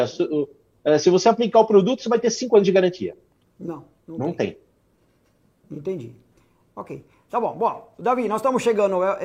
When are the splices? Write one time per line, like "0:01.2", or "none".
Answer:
none